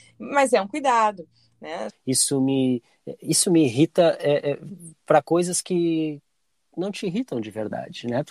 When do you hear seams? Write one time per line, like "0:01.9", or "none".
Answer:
0:01.9